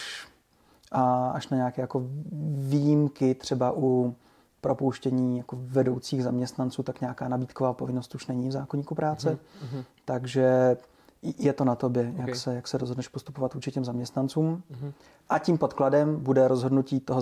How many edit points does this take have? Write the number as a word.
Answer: zero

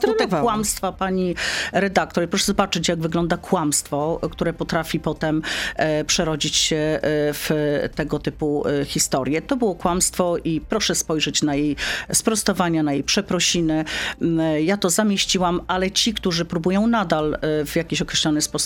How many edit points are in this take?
zero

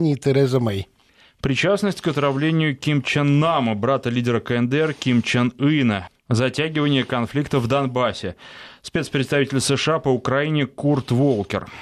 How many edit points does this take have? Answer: one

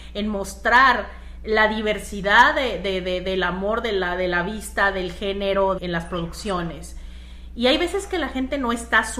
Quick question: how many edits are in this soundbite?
one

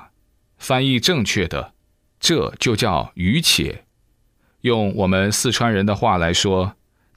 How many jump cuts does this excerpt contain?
one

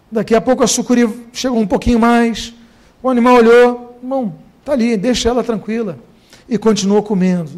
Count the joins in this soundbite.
zero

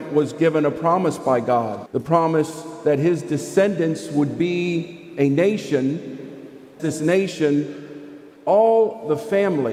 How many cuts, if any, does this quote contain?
two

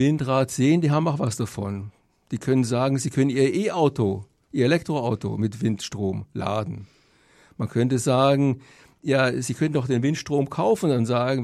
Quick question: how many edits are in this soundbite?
zero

